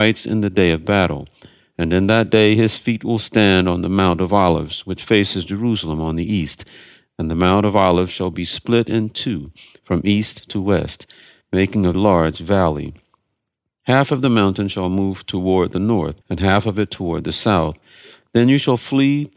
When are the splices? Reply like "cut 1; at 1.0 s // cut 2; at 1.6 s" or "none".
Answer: cut 1; at 11.9 s // cut 2; at 16.2 s